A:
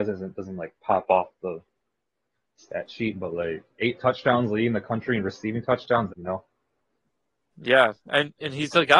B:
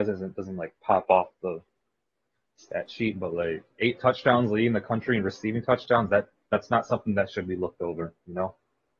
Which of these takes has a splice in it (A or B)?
A